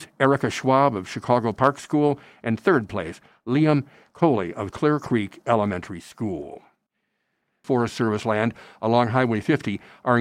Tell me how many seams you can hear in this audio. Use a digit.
1